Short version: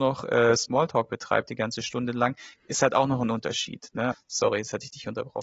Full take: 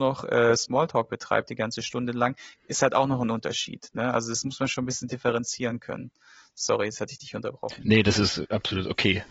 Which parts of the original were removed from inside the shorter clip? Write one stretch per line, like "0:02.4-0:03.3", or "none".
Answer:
0:04.1-0:06.4